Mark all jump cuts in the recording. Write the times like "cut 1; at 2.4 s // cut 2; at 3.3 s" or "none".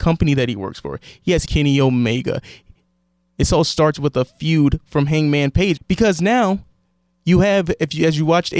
cut 1; at 1.4 s // cut 2; at 5.8 s

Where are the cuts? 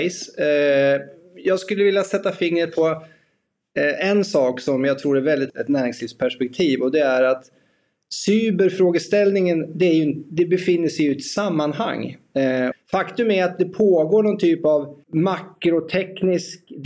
cut 1; at 5.5 s // cut 2; at 12.7 s // cut 3; at 15.0 s

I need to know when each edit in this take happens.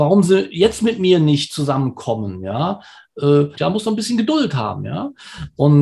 cut 1; at 3.5 s

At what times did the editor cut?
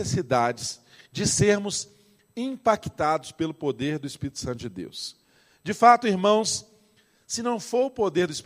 none

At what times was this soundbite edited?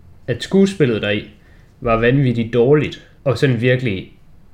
cut 1; at 3.2 s

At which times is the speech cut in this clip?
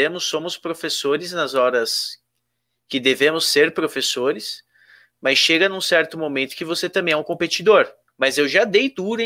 cut 1; at 8.1 s

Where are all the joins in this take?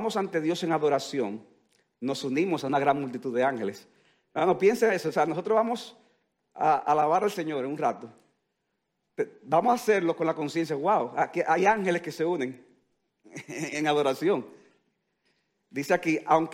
none

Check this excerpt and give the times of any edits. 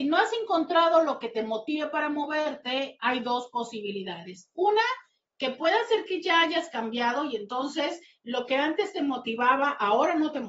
none

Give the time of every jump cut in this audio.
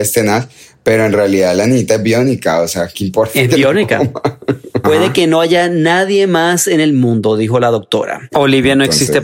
cut 1; at 4.8 s // cut 2; at 8.3 s

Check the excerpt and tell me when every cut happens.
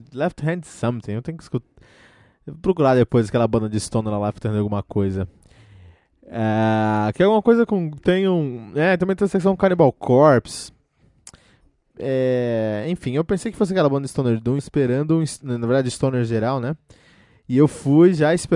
cut 1; at 14.6 s

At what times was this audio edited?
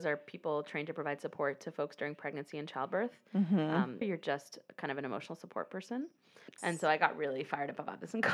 cut 1; at 4.0 s // cut 2; at 6.6 s

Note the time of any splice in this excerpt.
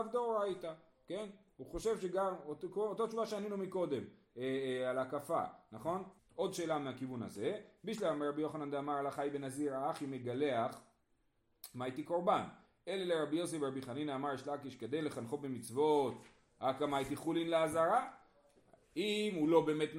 cut 1; at 6.2 s

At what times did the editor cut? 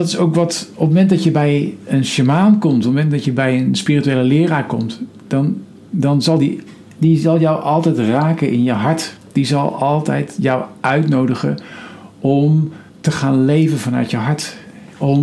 cut 1; at 12.9 s

